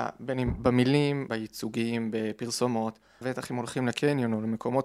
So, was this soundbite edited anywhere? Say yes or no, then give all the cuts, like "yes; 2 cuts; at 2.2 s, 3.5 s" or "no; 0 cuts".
yes; 2 cuts; at 1.3 s, 3.2 s